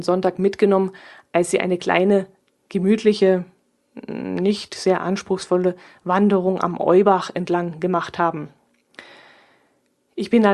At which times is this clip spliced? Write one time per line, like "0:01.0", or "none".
none